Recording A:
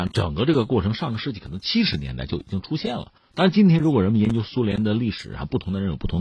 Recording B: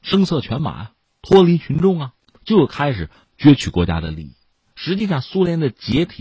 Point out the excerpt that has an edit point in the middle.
B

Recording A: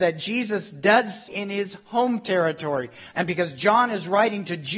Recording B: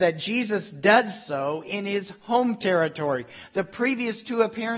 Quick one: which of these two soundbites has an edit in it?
A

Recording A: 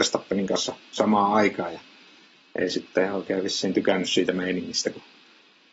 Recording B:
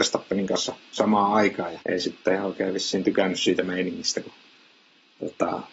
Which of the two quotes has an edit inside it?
B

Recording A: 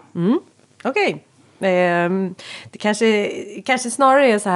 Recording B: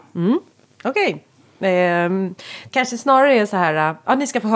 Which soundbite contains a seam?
B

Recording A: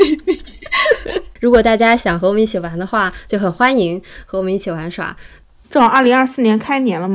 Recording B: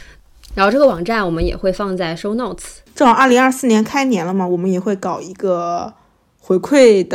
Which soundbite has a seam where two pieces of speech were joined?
A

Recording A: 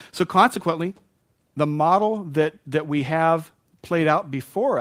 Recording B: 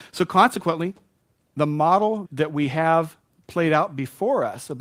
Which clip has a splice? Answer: B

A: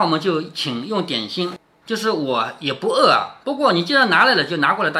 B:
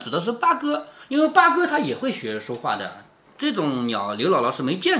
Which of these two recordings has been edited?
A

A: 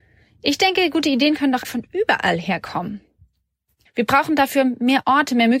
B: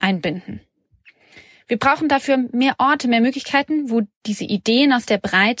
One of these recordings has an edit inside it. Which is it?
A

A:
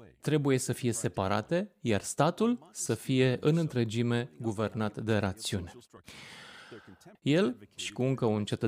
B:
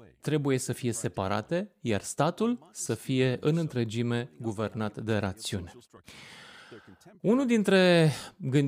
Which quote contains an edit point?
A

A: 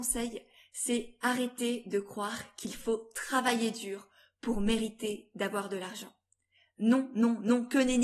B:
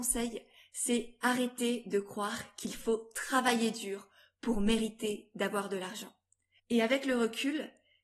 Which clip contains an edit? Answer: B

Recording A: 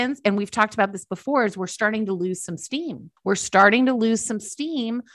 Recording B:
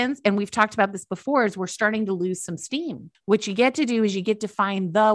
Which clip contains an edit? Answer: B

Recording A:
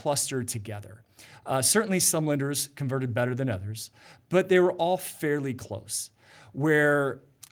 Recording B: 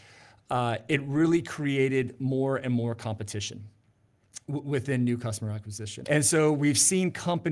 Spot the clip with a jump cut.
B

